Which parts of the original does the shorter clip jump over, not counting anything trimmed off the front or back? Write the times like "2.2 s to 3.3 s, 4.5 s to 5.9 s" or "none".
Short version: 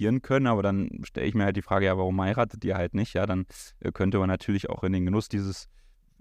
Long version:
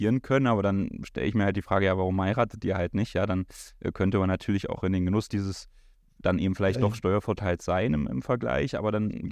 none